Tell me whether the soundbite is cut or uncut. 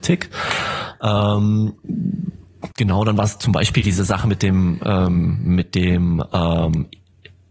cut